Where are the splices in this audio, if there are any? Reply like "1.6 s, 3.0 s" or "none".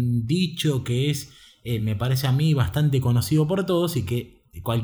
none